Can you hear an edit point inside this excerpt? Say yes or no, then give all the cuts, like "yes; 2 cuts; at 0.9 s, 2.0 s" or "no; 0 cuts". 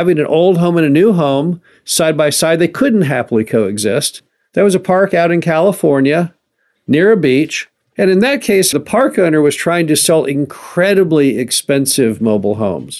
yes; 1 cut; at 8.7 s